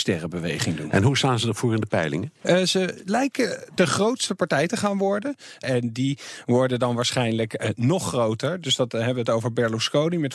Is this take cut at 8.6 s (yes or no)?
no